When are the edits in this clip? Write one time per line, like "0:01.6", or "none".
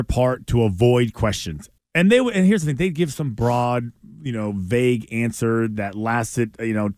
0:01.8